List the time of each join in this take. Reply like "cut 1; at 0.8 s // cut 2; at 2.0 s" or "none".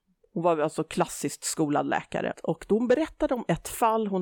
cut 1; at 2.3 s